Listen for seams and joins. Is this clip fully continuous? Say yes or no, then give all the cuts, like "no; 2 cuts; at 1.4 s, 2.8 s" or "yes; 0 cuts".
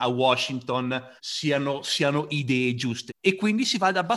no; 2 cuts; at 1.2 s, 3.1 s